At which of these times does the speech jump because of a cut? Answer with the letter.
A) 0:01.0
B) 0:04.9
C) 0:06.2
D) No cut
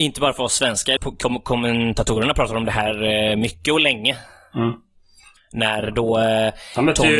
A